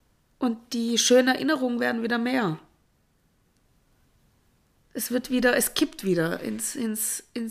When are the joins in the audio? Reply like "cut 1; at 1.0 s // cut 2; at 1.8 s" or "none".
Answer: none